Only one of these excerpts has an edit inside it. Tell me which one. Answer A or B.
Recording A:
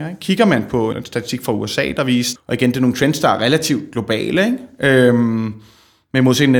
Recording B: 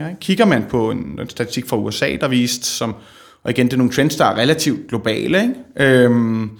A